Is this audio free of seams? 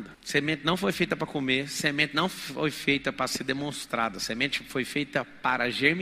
yes; 0 cuts

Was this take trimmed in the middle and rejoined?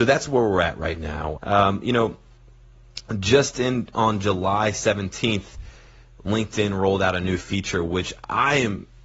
yes; 1 cut; at 1.4 s

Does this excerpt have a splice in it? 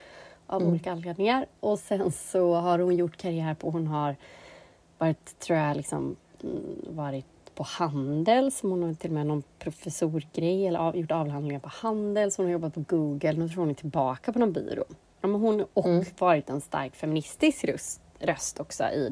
no; 0 cuts

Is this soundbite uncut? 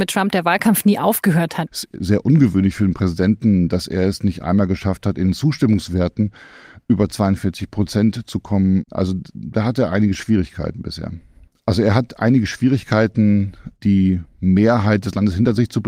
no; 2 cuts; at 1.7 s, 11.5 s

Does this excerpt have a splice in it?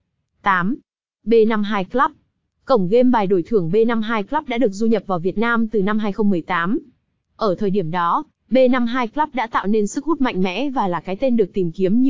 no; 0 cuts

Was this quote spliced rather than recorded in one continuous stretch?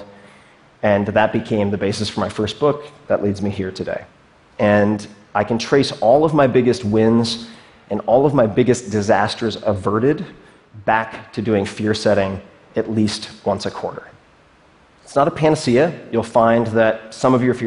no; 0 cuts

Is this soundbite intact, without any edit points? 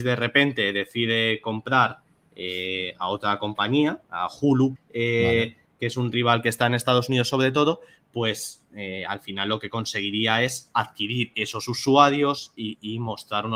no; 1 cut; at 4.8 s

